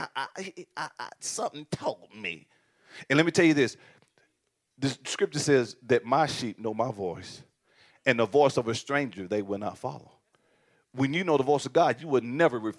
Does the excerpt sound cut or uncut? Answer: uncut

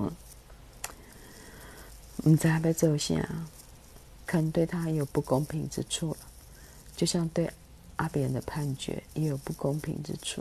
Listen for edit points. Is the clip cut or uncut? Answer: cut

